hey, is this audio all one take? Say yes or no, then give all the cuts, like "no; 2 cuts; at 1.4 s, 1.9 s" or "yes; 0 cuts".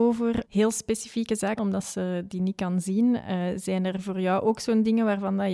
no; 1 cut; at 1.6 s